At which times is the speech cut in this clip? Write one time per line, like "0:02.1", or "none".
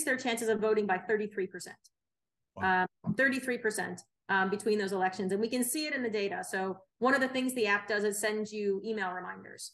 none